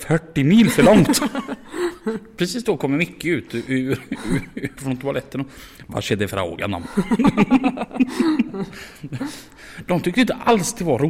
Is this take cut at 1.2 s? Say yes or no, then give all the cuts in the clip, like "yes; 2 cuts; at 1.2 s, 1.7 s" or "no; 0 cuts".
no; 1 cut; at 4.8 s